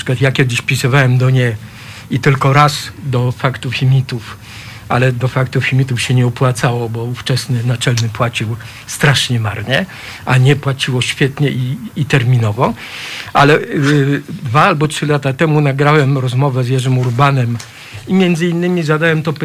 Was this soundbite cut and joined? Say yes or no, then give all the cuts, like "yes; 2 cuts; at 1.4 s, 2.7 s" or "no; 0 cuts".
no; 0 cuts